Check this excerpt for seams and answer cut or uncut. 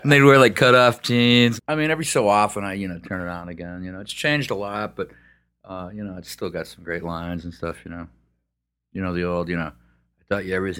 cut